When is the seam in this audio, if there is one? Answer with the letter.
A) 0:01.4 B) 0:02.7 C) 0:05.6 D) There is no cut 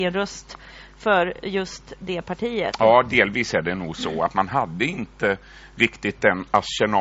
D